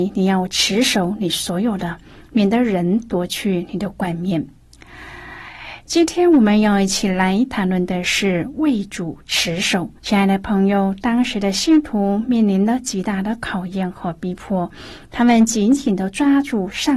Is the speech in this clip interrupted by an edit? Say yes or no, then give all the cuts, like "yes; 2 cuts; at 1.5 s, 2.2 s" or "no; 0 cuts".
yes; 1 cut; at 10.0 s